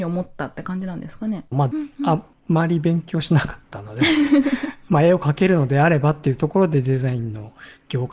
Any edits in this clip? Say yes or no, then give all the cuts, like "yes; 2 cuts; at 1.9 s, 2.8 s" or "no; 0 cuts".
yes; 1 cut; at 1.7 s